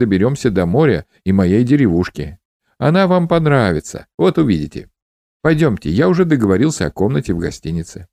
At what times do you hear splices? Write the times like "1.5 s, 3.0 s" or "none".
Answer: none